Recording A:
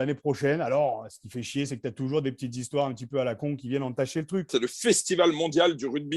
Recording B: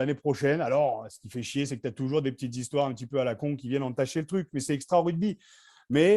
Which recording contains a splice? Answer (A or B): A